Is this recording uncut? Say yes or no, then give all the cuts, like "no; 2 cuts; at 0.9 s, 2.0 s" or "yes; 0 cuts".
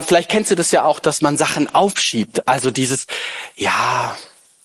yes; 0 cuts